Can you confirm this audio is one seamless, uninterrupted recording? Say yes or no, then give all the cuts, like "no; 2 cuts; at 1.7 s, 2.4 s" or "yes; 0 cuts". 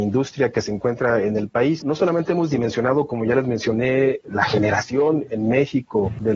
no; 1 cut; at 1.8 s